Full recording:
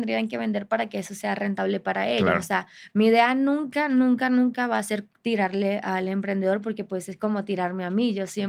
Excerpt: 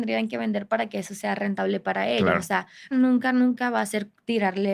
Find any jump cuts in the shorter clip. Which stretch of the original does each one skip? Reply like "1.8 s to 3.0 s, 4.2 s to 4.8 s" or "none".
2.9 s to 3.9 s

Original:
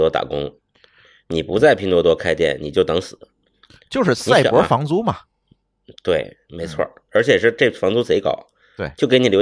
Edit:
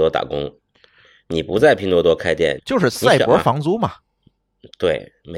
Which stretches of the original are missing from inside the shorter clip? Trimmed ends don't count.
2.6 s to 3.8 s

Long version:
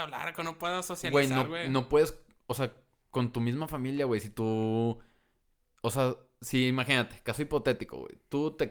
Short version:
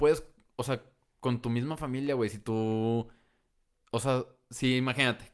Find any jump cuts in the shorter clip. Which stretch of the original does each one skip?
none

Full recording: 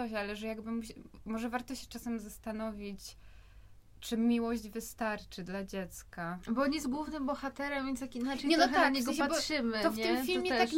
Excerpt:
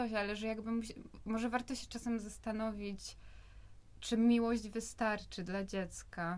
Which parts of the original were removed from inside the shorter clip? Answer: none

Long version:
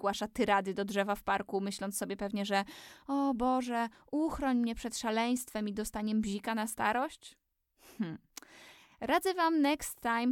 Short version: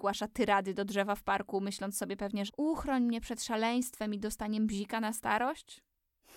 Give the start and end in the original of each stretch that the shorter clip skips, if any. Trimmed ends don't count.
2.5 s to 4.0 s

